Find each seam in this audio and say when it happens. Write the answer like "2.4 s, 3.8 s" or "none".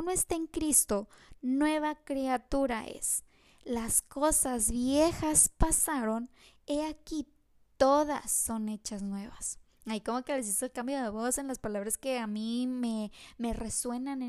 none